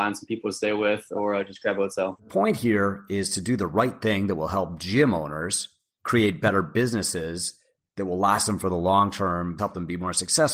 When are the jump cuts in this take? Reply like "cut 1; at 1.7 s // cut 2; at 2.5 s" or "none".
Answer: cut 1; at 2.2 s // cut 2; at 9.6 s